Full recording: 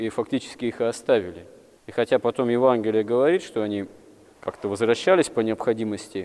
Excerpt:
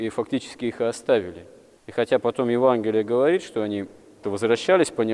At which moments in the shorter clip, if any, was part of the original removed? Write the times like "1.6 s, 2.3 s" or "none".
4.2 s